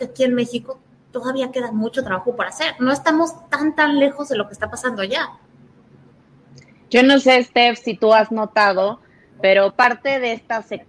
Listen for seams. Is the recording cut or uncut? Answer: uncut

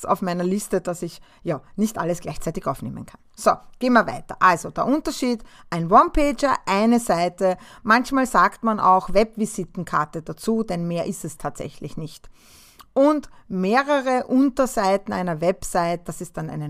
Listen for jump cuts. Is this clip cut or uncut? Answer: uncut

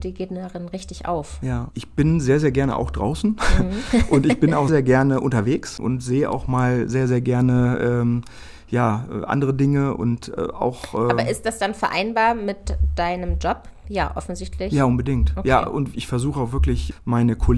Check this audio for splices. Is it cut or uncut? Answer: cut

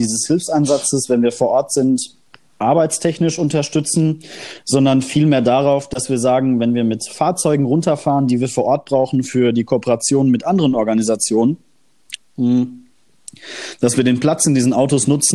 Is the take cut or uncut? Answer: cut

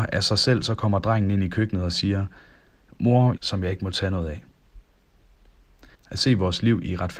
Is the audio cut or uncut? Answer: cut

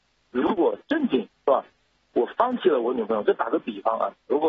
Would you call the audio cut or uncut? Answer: uncut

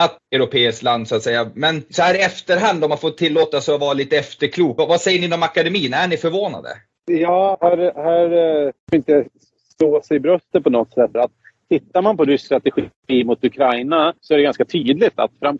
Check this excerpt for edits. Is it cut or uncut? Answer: cut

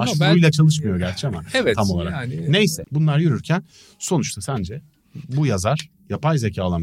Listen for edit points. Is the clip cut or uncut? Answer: cut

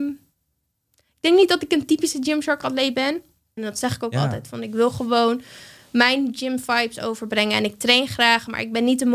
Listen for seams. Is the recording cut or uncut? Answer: cut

